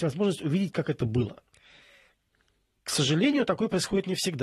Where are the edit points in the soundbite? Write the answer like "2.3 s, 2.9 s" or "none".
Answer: none